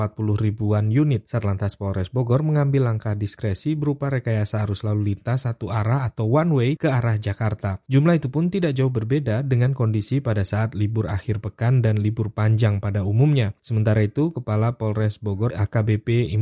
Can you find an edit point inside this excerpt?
no; 0 cuts

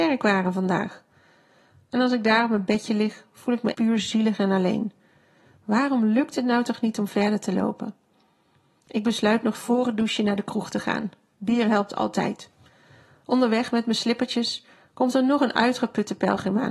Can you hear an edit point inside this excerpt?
yes; 1 cut; at 3.7 s

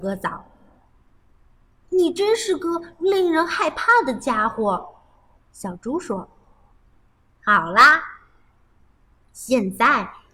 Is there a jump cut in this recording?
no; 0 cuts

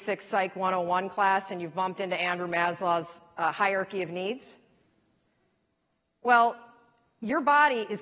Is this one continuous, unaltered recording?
yes; 0 cuts

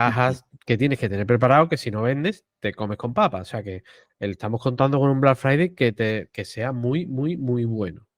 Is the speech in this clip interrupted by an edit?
no; 0 cuts

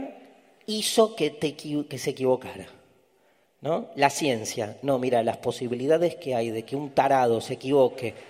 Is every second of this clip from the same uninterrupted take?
yes; 0 cuts

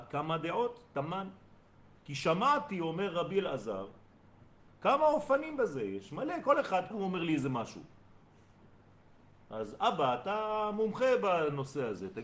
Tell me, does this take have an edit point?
yes; 1 cut; at 6.9 s

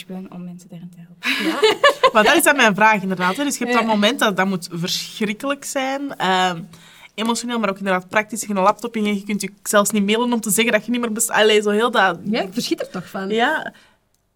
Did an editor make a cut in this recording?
no; 0 cuts

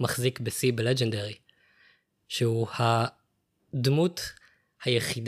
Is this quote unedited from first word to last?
yes; 0 cuts

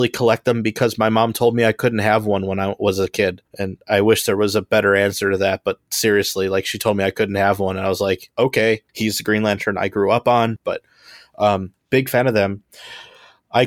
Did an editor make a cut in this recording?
yes; 3 cuts; at 3.5 s, 8.9 s, 10.6 s

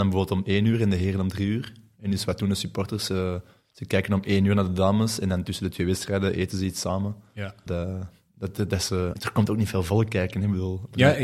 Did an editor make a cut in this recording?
yes; 2 cuts; at 7.7 s, 9.1 s

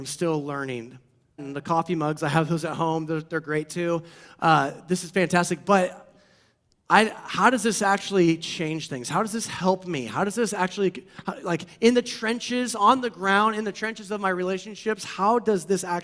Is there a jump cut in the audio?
yes; 1 cut; at 1.4 s

